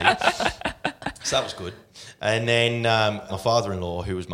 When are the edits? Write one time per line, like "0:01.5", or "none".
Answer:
0:03.3